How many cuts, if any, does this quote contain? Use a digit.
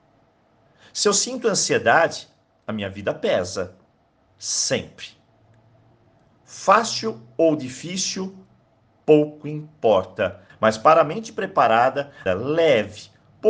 3